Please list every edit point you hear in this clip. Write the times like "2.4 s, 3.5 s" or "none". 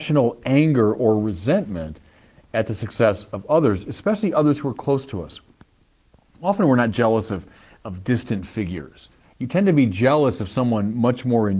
9.2 s

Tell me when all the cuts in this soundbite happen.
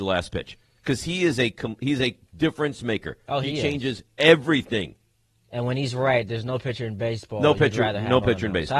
none

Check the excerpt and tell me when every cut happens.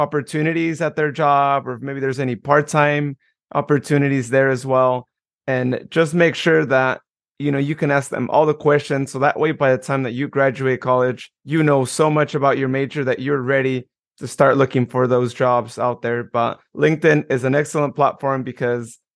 none

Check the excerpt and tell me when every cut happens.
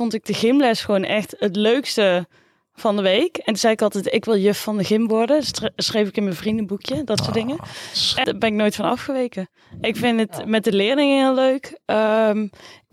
8.2 s

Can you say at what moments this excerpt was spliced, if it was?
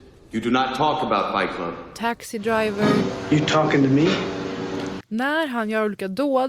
5.0 s

